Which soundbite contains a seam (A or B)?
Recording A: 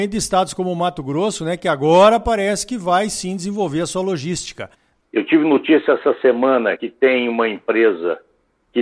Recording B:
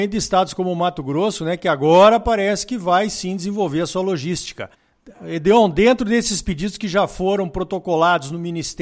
A